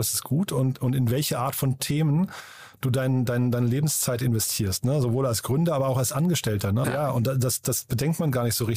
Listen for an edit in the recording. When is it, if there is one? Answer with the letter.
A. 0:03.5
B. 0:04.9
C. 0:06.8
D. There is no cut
C